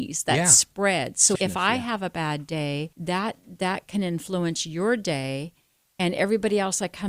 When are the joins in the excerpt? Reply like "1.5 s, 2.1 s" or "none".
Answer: 1.3 s, 2.9 s

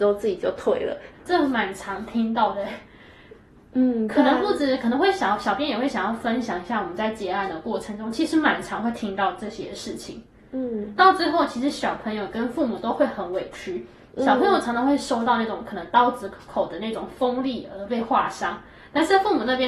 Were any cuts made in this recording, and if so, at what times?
1.1 s

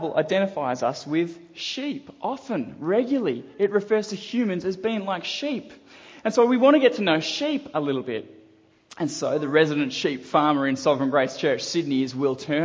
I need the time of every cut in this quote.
none

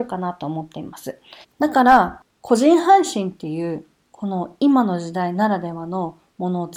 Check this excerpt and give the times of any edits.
1.4 s

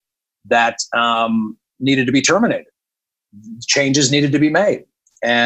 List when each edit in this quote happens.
none

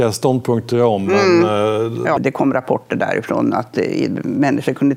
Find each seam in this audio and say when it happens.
2.2 s

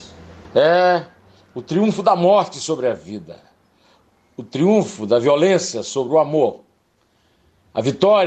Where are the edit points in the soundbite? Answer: none

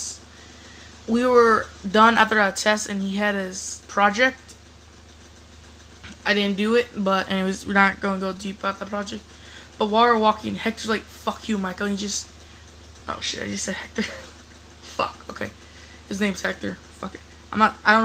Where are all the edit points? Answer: none

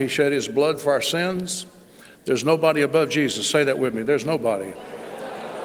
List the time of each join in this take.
none

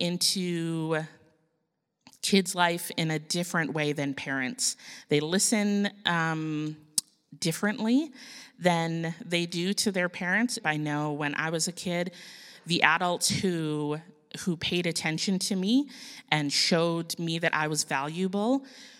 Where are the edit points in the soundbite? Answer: 10.6 s

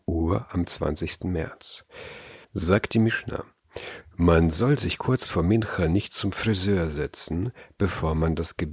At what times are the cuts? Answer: 2.4 s, 4.0 s

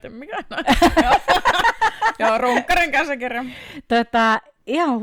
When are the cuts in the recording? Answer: none

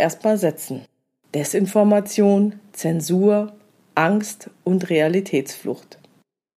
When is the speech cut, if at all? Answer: none

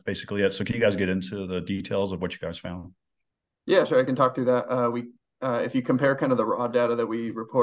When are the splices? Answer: none

